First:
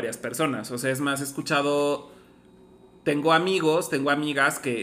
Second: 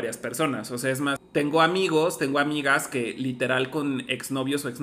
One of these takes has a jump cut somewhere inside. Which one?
second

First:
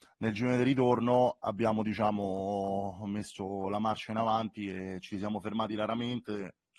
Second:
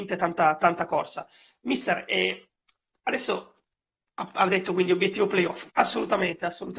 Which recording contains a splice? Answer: second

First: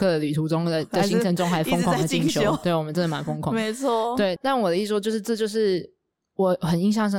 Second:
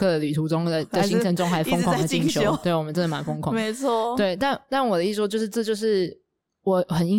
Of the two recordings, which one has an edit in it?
first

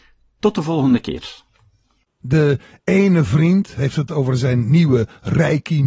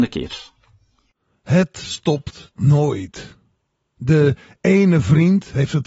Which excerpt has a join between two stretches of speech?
first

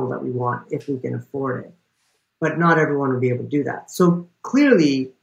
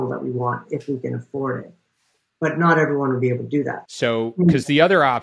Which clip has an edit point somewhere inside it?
second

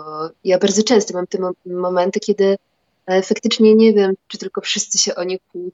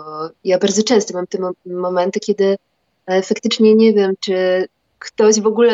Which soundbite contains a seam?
first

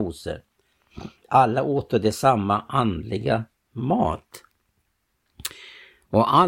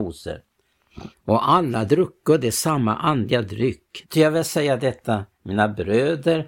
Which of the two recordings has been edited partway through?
second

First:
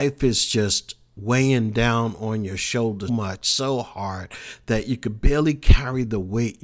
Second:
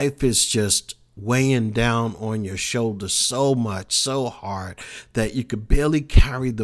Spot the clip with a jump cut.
first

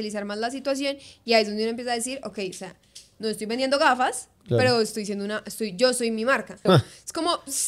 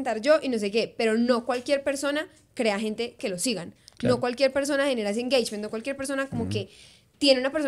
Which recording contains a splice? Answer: first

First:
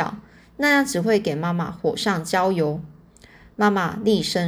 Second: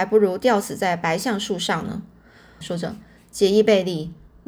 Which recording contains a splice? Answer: second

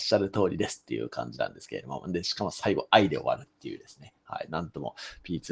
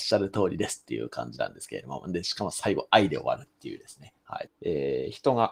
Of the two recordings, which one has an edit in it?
second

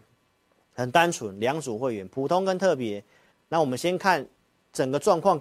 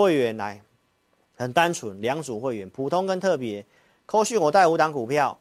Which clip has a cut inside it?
first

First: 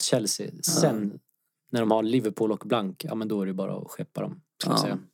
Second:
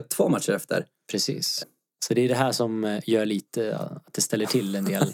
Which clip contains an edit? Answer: second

